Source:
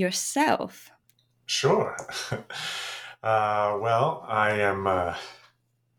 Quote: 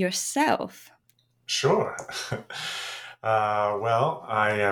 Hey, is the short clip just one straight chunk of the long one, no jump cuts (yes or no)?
yes